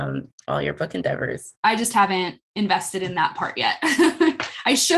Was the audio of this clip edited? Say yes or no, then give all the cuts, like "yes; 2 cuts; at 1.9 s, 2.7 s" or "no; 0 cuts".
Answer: yes; 1 cut; at 1.6 s